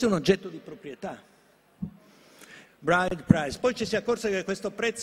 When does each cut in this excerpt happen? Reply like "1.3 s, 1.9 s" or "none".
2.6 s

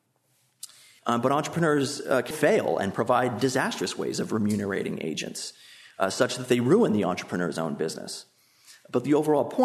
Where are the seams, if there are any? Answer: 1.0 s, 2.3 s

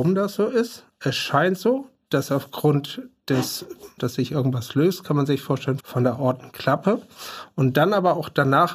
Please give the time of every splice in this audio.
4.0 s, 5.8 s

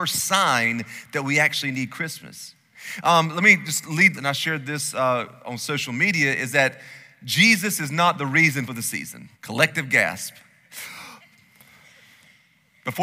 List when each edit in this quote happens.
4.2 s, 9.3 s

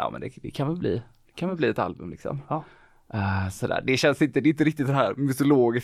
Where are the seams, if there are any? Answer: none

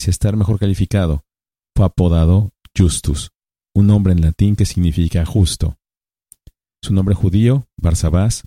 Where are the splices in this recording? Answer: none

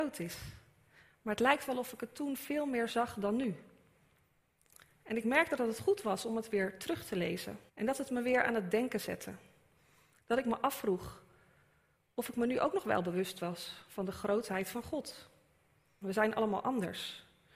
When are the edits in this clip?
7.7 s, 16.0 s

